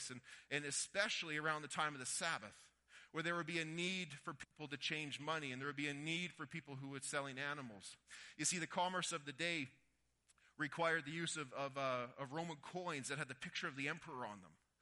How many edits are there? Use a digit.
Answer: 0